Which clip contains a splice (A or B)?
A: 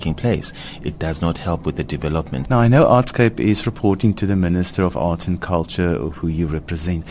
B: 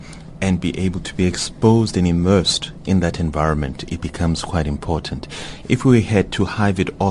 A